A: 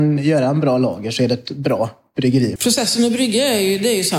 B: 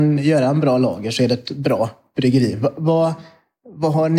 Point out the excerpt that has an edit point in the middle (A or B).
A